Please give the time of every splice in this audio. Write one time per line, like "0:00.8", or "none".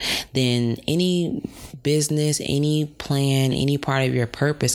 none